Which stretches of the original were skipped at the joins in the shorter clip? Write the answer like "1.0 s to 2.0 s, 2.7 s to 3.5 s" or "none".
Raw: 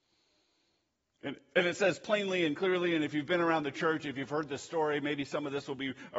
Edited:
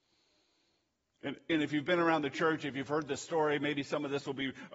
1.5 s to 2.9 s

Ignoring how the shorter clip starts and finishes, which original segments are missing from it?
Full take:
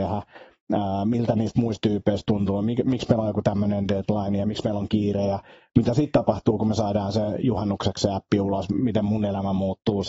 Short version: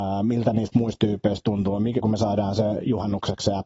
2.8 s to 6.6 s

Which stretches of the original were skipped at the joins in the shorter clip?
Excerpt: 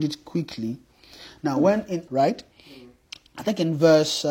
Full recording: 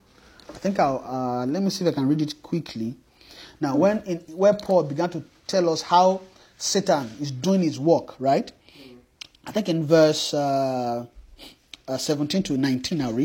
4.3 s to 8.2 s

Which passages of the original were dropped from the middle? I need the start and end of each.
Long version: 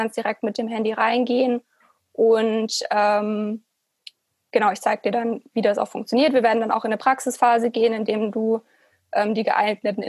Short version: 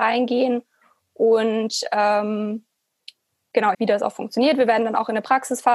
4.7 s to 5.5 s

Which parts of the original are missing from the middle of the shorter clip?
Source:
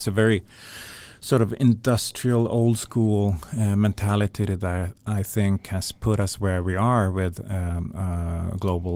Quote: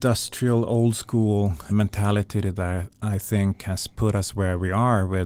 3.5 s to 3.7 s

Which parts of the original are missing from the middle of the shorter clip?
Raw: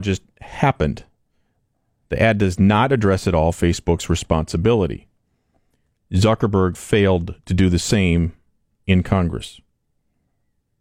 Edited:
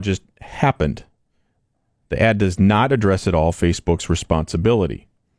none

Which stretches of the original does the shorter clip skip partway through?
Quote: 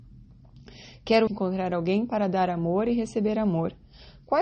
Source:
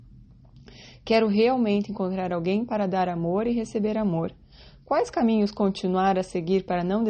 1.3 s to 1.9 s

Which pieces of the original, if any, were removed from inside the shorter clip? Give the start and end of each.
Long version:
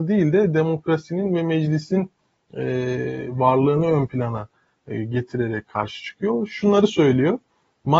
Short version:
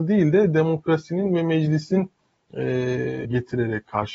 3.2 s to 5.1 s

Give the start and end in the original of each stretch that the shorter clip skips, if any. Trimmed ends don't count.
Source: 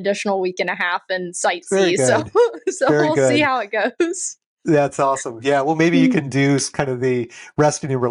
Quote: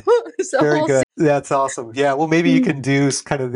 3.3 s to 4.5 s

